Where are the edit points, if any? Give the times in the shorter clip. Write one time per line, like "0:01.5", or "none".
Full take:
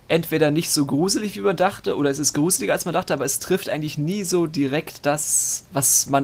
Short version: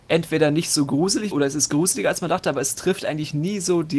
0:01.3